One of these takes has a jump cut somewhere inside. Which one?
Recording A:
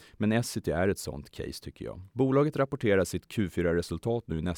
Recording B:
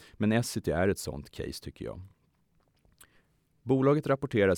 A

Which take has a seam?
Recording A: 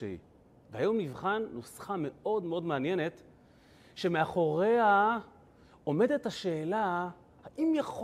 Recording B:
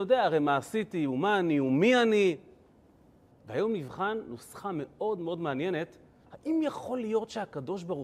B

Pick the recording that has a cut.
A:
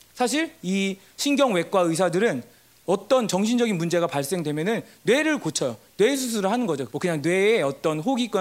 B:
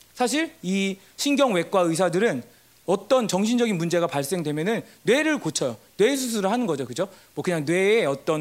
A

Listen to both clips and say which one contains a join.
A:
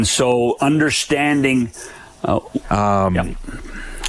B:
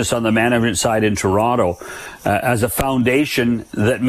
A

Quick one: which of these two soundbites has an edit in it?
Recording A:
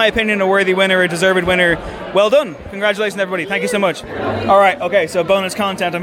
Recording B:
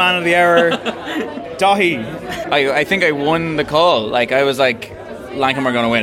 B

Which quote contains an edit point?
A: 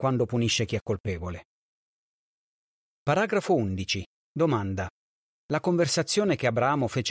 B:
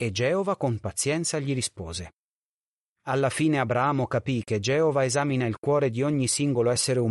A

